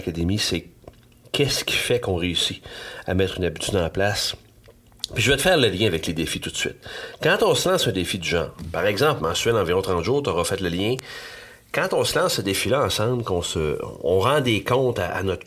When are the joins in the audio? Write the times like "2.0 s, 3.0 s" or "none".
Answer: 9.2 s